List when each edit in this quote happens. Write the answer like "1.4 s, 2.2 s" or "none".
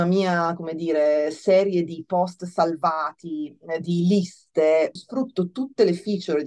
5.0 s

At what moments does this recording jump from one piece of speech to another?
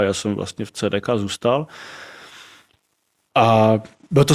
none

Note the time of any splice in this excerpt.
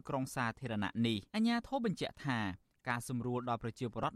1.3 s

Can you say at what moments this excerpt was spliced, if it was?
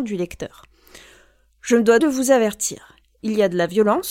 2.0 s

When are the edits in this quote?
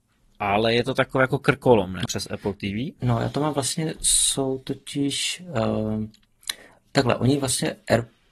2.0 s

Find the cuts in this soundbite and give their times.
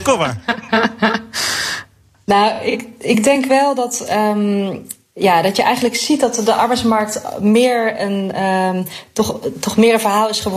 none

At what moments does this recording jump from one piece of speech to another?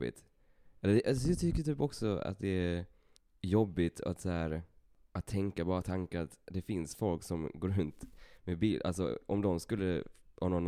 none

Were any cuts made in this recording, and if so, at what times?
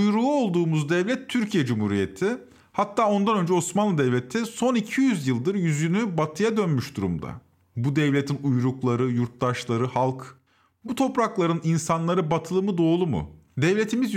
7.6 s

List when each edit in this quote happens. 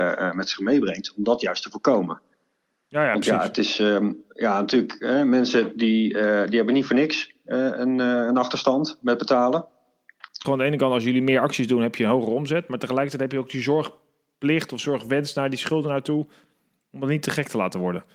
10.4 s

